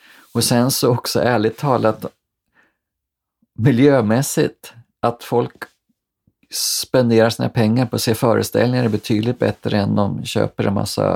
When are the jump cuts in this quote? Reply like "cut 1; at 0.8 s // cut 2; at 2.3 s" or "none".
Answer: none